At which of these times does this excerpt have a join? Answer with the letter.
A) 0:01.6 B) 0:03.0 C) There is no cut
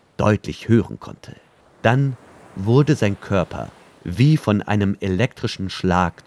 A